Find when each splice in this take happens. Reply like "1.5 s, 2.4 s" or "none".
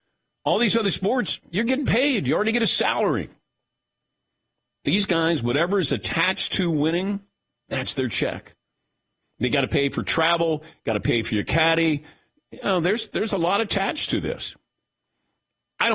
none

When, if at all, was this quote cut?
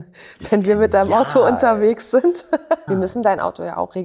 2.9 s

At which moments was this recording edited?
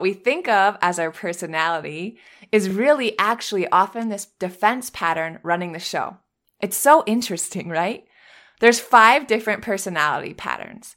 none

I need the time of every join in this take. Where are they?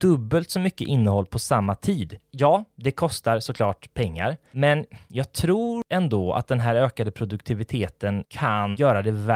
none

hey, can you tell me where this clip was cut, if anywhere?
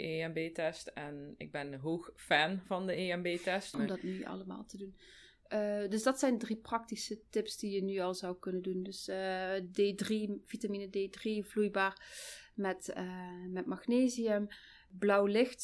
3.7 s

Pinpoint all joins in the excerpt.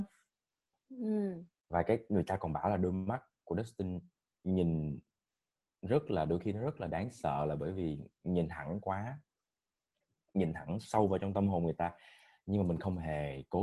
1.5 s

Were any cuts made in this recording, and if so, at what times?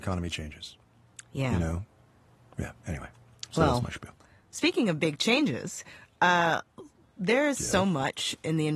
none

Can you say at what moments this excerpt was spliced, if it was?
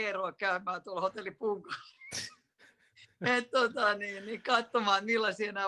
none

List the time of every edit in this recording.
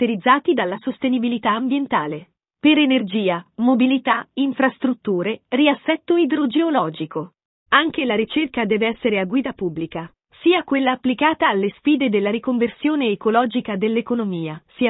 none

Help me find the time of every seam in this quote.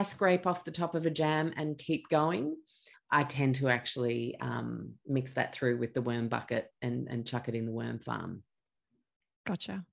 2.9 s

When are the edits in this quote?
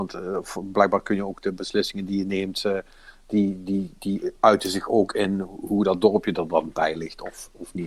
none

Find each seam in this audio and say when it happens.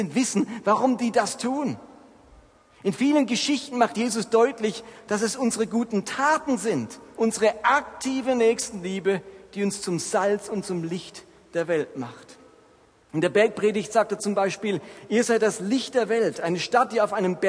7.2 s

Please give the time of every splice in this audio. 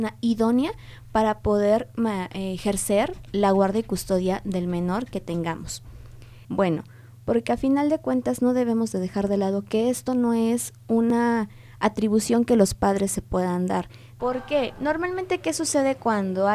6.4 s, 14.2 s

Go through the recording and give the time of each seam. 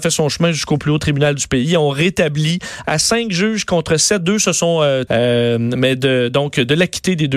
5.1 s

